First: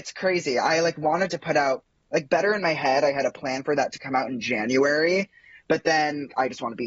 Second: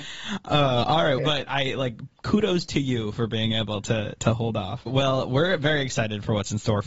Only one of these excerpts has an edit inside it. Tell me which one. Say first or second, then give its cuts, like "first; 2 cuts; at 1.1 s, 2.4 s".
second; 2 cuts; at 1.2 s, 4.9 s